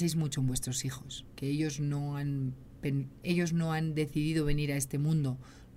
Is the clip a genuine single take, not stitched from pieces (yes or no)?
yes